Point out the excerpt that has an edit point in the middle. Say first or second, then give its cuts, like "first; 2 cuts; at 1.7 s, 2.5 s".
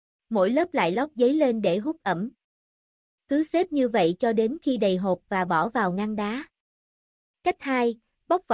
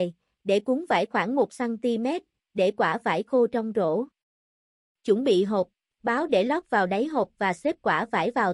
second; 2 cuts; at 2.4 s, 5.9 s